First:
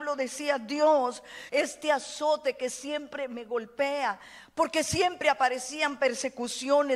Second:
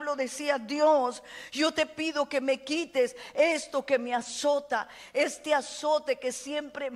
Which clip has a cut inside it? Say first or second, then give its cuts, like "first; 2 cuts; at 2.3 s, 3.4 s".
first; 1 cut; at 1.5 s